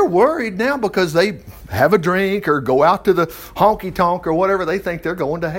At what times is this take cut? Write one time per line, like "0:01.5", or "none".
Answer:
none